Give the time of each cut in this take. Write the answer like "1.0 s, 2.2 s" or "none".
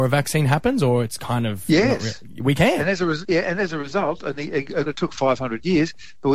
3.2 s, 4.9 s

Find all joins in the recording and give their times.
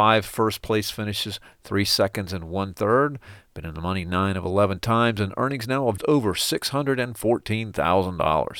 6.0 s

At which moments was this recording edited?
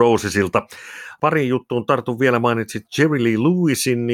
1.2 s

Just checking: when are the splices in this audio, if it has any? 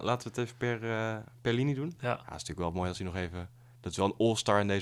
2.0 s

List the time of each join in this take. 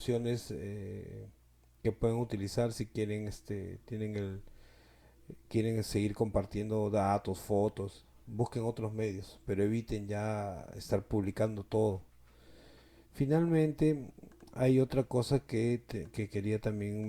none

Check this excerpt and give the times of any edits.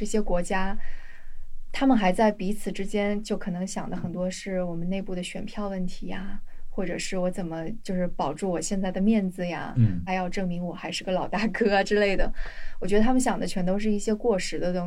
10.1 s

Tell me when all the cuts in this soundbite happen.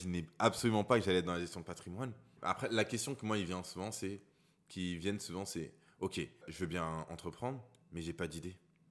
2.4 s, 6.4 s

